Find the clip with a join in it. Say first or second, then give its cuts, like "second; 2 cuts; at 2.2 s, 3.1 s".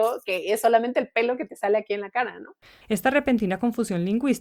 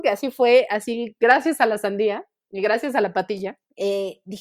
first; 1 cut; at 2.8 s